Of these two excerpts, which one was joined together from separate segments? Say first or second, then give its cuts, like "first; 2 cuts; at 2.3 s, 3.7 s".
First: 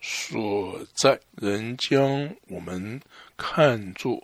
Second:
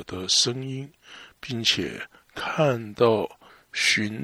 first; 1 cut; at 1.3 s